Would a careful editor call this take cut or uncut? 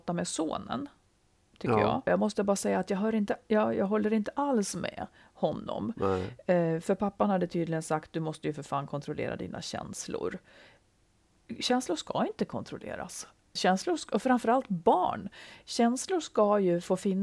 cut